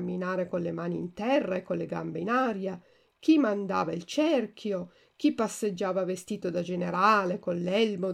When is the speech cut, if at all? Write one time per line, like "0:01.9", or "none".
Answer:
none